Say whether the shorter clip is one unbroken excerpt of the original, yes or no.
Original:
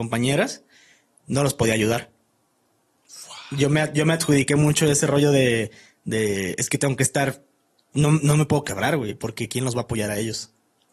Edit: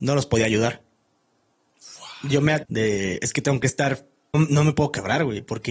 no